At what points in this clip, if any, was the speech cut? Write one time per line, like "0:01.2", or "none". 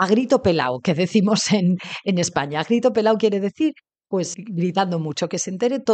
0:04.3